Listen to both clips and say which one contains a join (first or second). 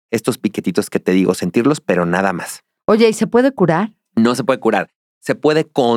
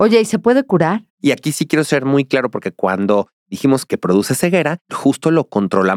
second